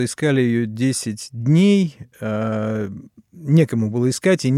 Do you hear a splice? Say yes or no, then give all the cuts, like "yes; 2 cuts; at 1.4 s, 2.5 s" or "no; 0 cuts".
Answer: no; 0 cuts